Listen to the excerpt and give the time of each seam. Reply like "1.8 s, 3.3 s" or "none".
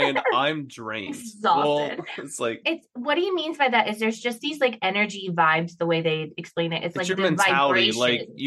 2.6 s